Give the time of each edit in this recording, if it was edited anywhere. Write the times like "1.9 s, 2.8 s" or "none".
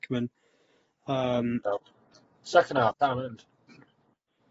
1.6 s, 2.9 s